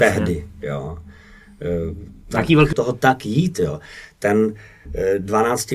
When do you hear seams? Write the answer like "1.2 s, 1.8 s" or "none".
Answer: 2.7 s